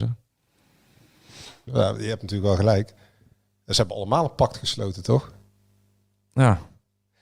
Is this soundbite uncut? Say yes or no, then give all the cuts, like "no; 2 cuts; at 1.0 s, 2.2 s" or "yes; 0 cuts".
no; 1 cut; at 1.7 s